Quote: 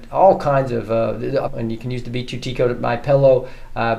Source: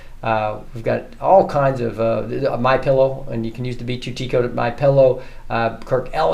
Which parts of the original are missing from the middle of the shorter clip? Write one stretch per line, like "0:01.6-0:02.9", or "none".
0:02.6-0:03.2